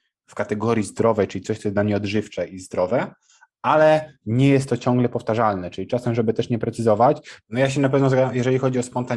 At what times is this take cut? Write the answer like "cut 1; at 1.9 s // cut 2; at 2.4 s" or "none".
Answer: cut 1; at 7.4 s